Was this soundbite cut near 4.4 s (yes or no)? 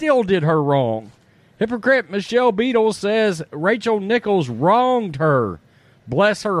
no